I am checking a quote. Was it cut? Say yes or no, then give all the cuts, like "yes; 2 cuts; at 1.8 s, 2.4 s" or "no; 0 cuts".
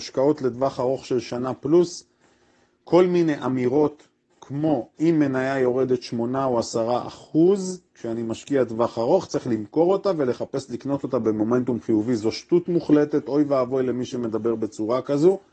no; 0 cuts